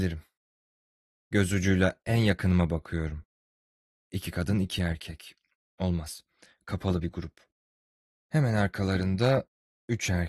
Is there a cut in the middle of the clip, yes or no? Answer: no